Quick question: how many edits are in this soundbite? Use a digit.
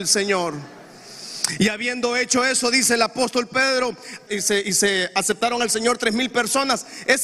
1